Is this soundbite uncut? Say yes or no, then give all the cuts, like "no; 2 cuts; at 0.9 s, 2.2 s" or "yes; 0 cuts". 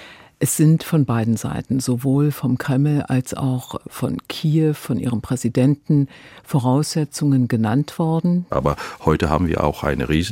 no; 1 cut; at 8.5 s